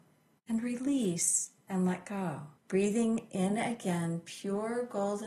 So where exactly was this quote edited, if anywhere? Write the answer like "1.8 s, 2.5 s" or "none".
2.6 s